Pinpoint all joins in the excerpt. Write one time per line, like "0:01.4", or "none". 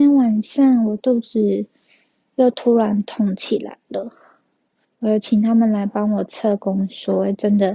0:04.8

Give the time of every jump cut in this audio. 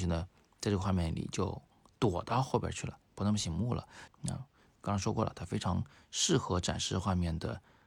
0:04.1

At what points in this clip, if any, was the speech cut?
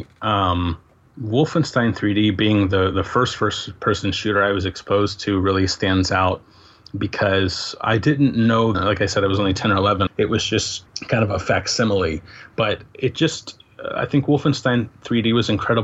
0:08.7
0:10.1

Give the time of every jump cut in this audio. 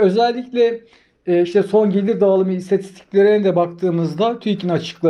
none

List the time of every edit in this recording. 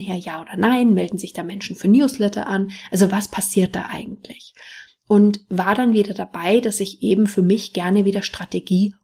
none

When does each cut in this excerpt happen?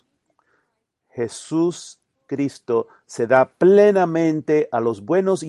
none

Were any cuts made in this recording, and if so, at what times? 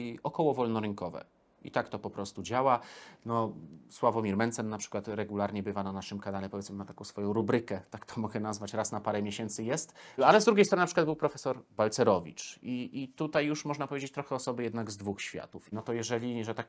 0:10.2
0:15.7

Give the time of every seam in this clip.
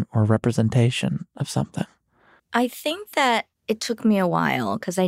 0:02.4
0:03.6

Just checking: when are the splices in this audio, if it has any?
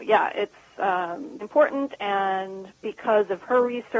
0:01.4

